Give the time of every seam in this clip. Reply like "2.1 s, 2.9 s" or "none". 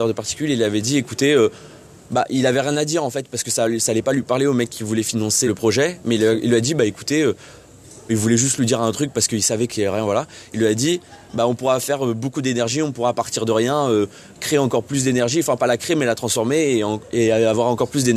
5.5 s, 8.1 s